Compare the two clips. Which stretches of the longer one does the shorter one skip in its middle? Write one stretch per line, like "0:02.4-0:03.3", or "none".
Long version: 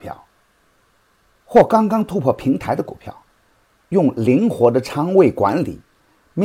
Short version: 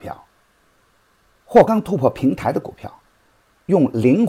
0:01.7-0:01.9